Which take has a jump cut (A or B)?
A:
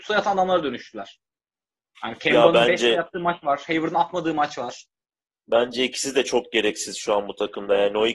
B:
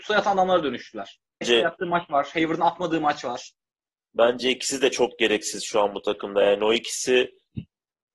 B